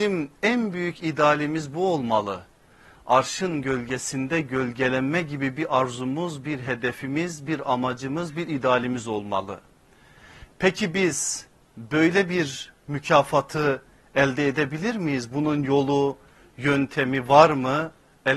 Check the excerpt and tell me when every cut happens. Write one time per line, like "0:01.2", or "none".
none